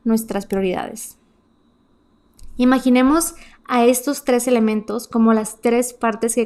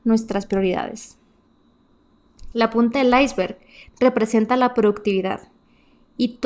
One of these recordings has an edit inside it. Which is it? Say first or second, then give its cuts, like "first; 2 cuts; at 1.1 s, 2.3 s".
second; 1 cut; at 2.5 s